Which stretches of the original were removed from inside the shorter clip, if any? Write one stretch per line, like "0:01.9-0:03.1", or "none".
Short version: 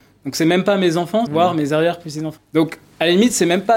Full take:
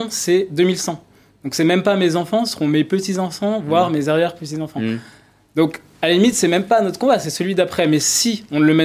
0:02.5-0:03.6
0:04.7-0:05.4